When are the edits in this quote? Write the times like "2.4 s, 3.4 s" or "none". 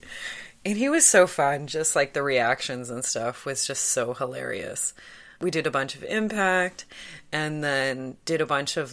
none